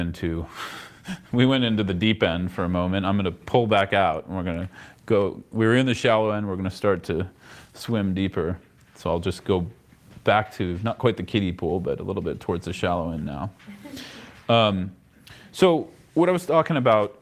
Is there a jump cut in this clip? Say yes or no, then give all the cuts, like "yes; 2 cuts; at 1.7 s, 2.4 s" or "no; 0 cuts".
no; 0 cuts